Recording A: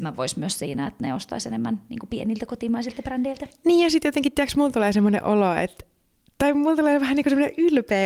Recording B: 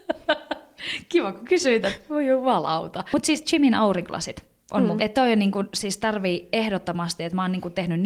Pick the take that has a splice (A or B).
B